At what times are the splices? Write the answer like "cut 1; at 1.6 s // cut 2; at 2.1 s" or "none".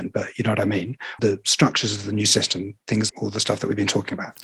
cut 1; at 1.2 s // cut 2; at 3.1 s